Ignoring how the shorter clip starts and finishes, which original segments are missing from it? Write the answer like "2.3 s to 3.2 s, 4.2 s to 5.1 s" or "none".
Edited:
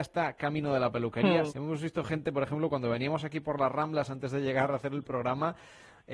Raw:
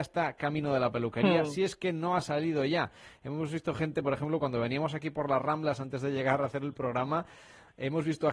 1.5 s to 3.2 s